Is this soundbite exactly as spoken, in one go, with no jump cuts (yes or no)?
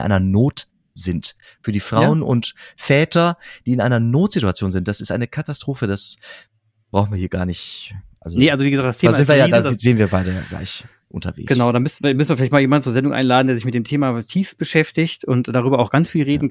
yes